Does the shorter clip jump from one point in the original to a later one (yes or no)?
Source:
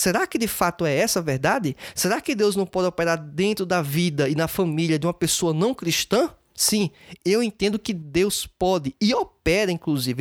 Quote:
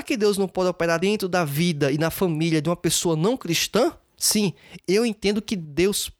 yes